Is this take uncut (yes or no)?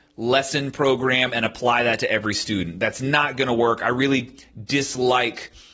yes